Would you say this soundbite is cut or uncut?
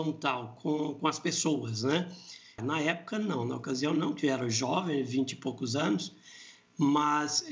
cut